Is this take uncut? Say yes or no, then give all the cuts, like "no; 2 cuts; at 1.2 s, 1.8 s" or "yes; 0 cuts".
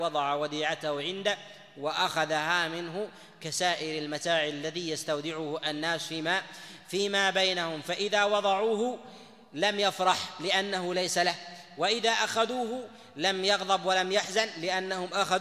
yes; 0 cuts